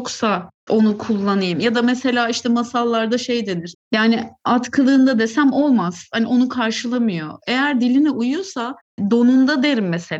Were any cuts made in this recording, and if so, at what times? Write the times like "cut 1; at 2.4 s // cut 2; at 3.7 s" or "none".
cut 1; at 3.7 s